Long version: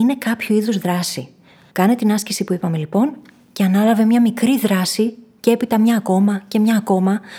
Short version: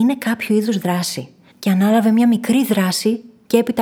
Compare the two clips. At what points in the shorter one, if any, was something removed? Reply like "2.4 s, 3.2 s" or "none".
1.5 s